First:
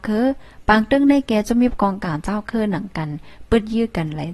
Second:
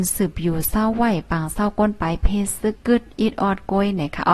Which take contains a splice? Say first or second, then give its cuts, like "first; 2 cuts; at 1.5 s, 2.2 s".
second; 1 cut; at 2.7 s